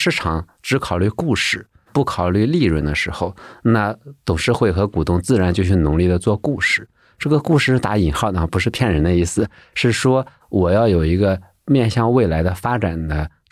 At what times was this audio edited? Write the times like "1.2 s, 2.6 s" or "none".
none

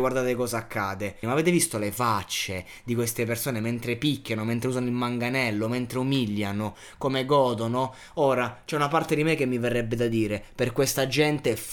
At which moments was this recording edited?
1.2 s

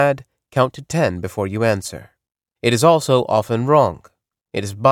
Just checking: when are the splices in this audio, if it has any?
2.6 s

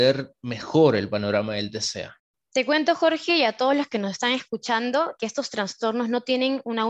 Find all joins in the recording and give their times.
5.2 s

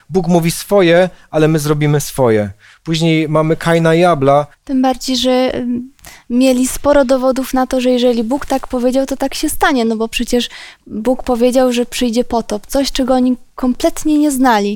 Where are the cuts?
4.5 s

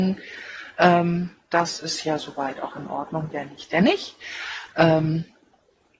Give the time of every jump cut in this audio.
3.3 s, 4.7 s

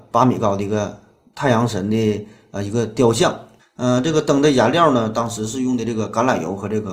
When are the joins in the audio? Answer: 3.6 s

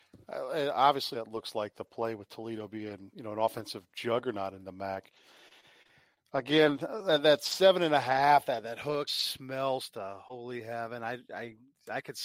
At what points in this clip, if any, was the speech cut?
1.1 s, 3.1 s, 9.1 s

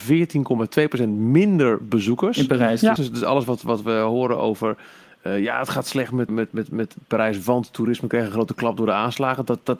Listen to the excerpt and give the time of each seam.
3.0 s, 6.3 s

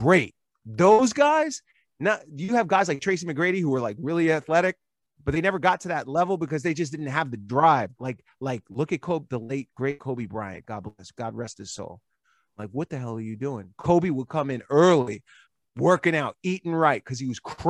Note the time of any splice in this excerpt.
8.0 s, 12.6 s

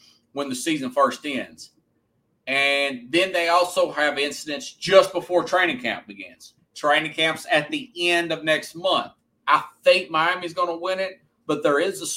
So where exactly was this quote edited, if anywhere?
6.6 s, 9.4 s

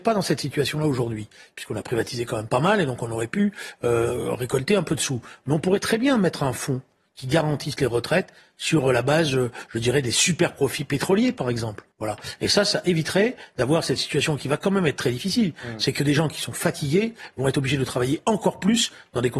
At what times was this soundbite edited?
11.9 s

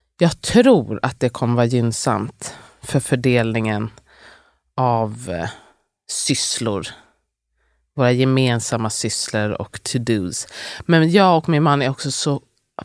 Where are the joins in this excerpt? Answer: none

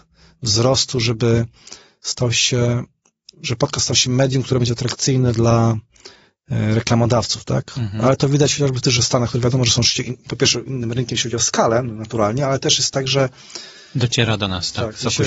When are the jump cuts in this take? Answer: none

